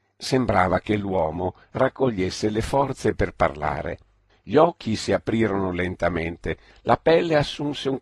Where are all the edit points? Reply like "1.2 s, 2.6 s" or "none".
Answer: 4.3 s, 6.7 s